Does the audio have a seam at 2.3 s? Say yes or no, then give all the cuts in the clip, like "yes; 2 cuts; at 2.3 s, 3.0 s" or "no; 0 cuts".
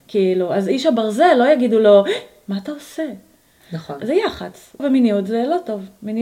no; 2 cuts; at 3.6 s, 4.8 s